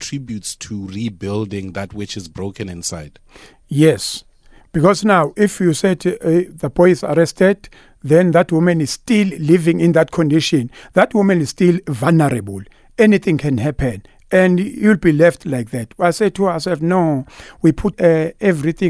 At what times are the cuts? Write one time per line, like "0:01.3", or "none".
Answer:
0:17.9